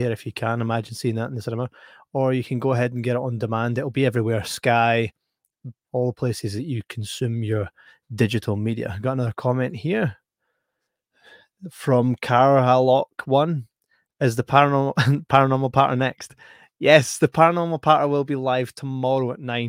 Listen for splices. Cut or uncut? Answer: cut